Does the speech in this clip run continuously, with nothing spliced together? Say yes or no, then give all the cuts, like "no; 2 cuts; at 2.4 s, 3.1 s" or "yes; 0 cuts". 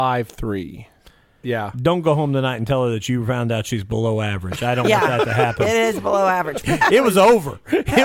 no; 2 cuts; at 1.4 s, 6.6 s